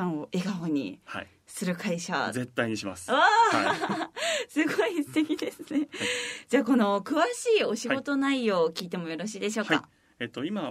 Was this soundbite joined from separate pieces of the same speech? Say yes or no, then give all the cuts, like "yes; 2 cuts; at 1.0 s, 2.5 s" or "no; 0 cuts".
no; 0 cuts